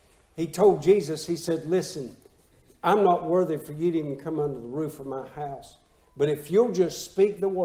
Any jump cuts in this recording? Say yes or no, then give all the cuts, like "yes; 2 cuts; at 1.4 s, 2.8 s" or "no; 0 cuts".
no; 0 cuts